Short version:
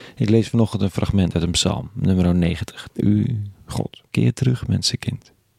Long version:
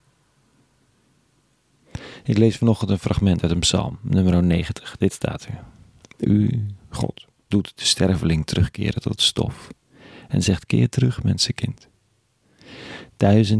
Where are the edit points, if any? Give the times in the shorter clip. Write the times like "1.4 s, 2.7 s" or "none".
2.9 s, 4.1 s